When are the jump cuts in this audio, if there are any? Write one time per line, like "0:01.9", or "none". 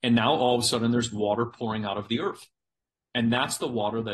none